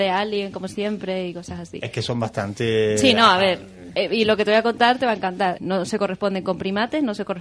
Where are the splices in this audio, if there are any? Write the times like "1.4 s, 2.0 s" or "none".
5.6 s